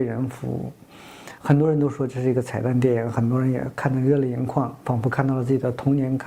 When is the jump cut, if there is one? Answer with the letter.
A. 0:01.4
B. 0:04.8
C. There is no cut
A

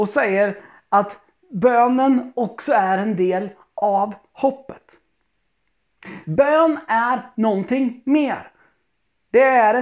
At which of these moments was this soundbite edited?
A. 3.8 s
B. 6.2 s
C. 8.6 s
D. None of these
B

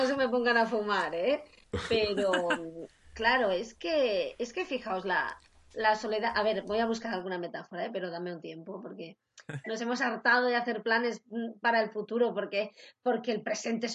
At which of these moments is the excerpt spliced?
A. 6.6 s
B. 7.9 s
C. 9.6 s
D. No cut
C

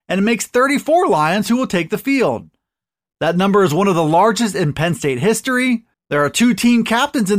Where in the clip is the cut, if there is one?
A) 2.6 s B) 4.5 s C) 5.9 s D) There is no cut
C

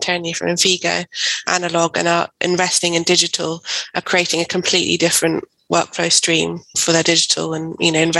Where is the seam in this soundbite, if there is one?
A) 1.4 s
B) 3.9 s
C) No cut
A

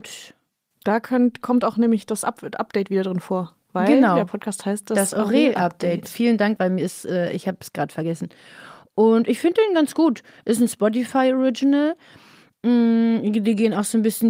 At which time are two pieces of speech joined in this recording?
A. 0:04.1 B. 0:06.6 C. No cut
B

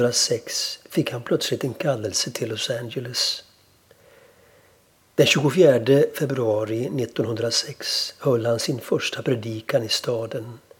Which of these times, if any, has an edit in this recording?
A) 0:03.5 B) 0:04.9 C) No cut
C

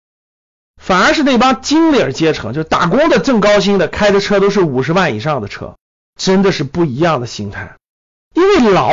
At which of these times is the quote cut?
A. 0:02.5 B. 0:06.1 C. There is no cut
B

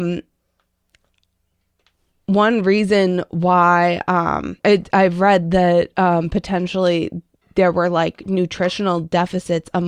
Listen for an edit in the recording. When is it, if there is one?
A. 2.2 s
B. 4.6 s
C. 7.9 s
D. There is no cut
B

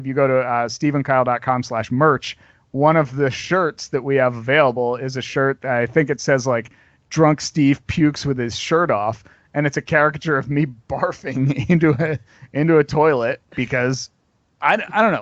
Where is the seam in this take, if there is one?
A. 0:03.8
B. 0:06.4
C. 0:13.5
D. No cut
C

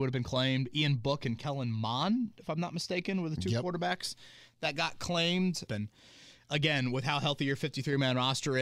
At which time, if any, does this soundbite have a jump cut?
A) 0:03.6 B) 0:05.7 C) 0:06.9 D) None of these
B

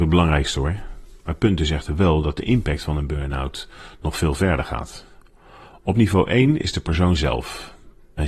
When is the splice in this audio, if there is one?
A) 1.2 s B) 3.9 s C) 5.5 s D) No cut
D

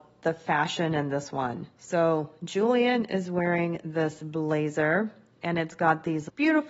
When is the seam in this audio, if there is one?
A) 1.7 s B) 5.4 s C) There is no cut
C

